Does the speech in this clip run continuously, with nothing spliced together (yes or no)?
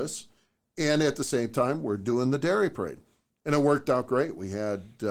yes